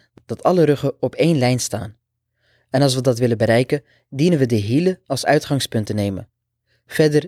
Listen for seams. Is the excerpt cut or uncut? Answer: uncut